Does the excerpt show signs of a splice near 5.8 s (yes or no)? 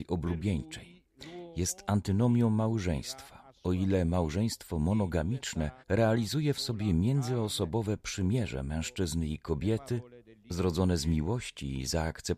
yes